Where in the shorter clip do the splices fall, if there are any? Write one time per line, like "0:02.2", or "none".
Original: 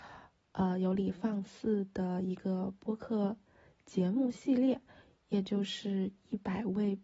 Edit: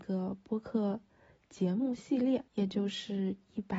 0:02.5